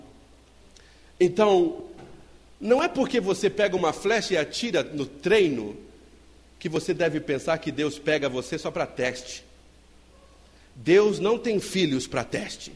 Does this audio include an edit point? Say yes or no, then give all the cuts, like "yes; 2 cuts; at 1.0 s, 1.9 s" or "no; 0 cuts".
no; 0 cuts